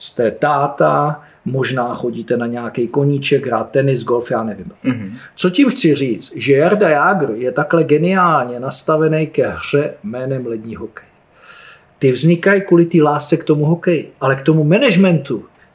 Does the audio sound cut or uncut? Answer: cut